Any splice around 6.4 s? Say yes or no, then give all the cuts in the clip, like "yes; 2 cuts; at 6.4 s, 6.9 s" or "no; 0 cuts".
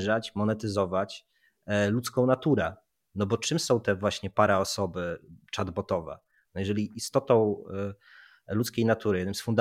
yes; 1 cut; at 6.4 s